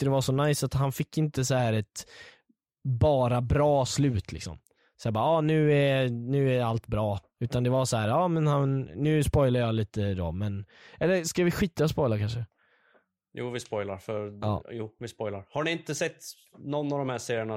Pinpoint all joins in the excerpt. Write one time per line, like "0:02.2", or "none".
none